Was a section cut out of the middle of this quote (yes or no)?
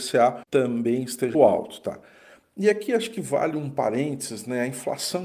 yes